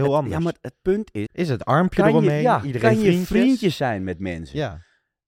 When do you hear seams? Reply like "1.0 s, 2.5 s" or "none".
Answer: 1.3 s

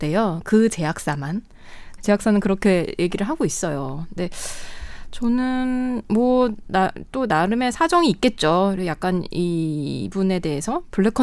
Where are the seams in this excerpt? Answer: 2.0 s

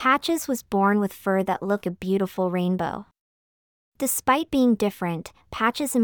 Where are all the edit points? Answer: 1.8 s

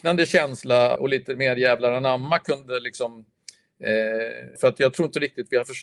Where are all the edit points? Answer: 1.0 s, 4.6 s

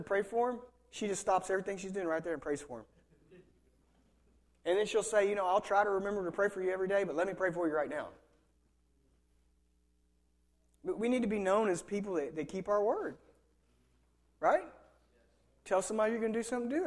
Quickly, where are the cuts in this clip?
none

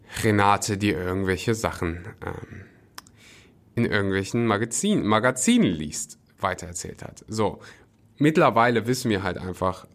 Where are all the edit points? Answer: none

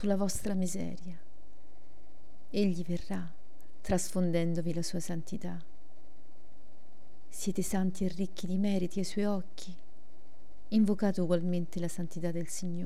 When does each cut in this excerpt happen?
none

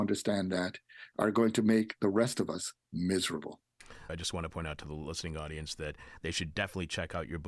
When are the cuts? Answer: 4.1 s

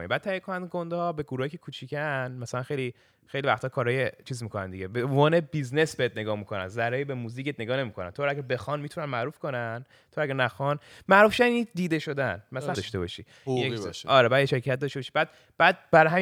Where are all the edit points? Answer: 12.7 s

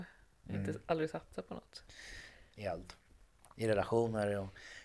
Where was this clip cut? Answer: 2.5 s

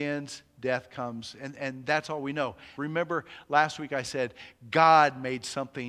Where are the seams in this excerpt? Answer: 2.8 s

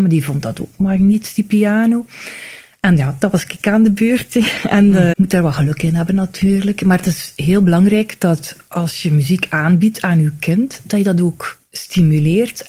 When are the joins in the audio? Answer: 5.1 s

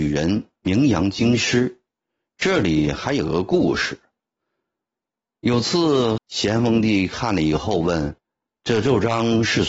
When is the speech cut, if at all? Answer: 6.2 s, 8.2 s

